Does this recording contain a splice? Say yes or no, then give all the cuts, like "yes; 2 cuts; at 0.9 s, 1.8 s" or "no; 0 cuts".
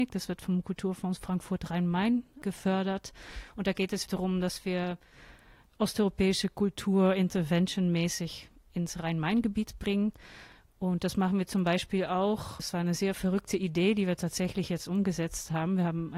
yes; 1 cut; at 4.1 s